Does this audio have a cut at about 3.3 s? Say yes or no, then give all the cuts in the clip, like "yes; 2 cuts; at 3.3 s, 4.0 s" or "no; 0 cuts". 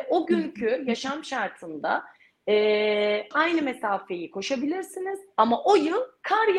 yes; 1 cut; at 3.3 s